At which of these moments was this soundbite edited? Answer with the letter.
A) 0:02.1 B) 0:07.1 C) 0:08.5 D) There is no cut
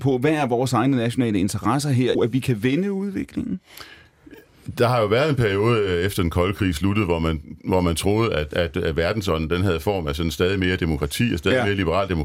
A